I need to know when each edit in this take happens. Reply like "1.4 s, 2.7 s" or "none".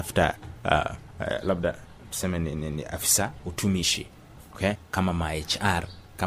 4.7 s